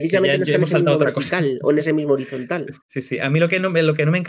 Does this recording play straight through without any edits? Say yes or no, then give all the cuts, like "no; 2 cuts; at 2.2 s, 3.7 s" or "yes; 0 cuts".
no; 1 cut; at 2.8 s